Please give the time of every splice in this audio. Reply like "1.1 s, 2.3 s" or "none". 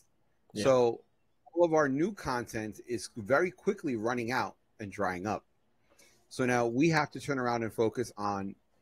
none